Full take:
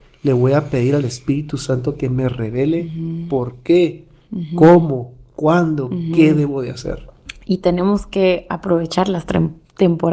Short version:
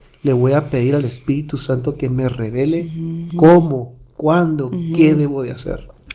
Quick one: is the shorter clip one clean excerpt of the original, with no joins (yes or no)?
no